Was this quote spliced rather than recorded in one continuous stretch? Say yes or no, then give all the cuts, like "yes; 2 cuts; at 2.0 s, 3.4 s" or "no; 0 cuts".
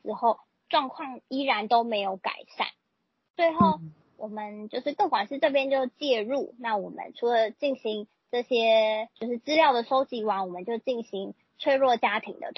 no; 0 cuts